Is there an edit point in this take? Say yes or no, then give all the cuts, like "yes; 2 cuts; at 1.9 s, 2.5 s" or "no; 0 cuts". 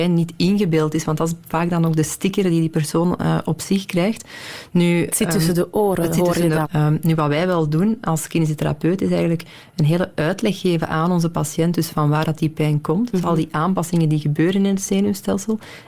yes; 1 cut; at 6.6 s